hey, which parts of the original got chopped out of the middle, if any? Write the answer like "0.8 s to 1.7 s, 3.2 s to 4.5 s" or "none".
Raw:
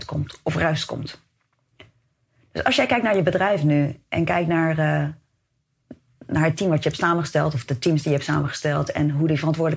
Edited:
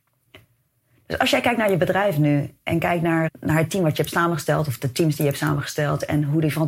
4.7 s to 6.1 s

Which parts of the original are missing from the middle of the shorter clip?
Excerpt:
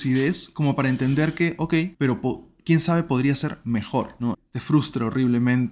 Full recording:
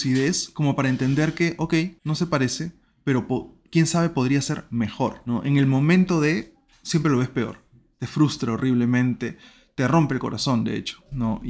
1.9 s to 3.0 s, 5.4 s to 7.8 s

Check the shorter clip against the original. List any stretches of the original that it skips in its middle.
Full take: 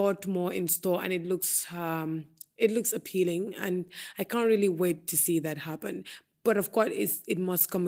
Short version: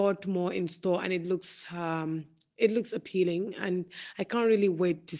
none

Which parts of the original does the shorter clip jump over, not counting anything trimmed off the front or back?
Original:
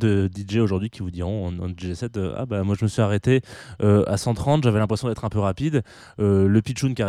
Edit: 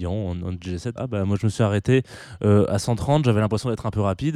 2.1 s to 2.3 s

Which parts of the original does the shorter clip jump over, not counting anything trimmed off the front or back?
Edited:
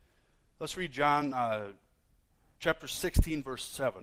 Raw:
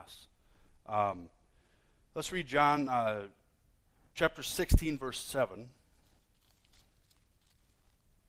none

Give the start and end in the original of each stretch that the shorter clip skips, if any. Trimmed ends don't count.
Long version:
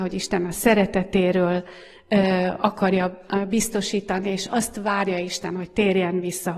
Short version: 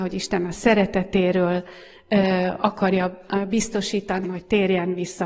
4.2 s to 5.5 s

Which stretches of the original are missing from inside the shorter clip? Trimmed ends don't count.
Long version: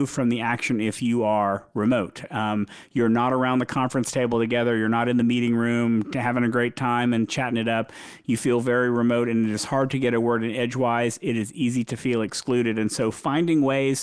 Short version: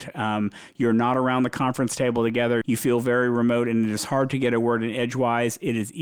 4.8 s to 8.2 s

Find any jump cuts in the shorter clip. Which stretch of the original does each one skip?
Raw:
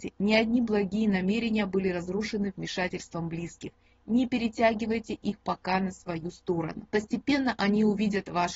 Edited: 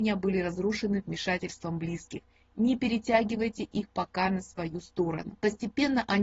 none

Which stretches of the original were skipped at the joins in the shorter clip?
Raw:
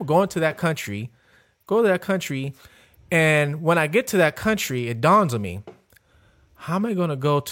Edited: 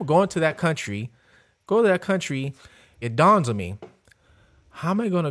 3.0 s to 4.9 s

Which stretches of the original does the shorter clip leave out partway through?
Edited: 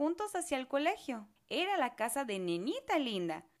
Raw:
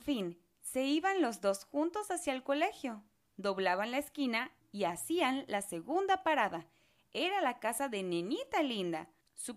3.1 s to 7.0 s

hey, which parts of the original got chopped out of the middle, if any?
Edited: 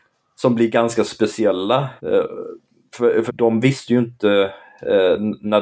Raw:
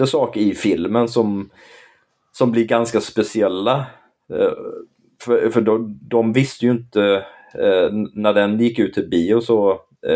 3.9 s to 4.2 s, 5.5 s to 6.0 s

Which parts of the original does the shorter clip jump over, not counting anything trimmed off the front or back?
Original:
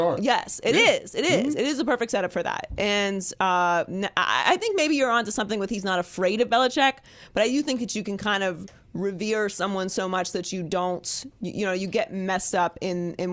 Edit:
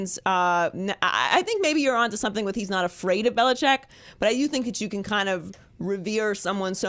none

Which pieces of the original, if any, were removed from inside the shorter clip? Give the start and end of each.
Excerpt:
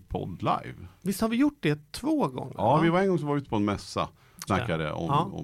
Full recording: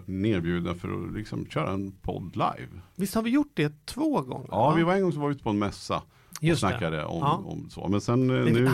6.4 s to 6.6 s

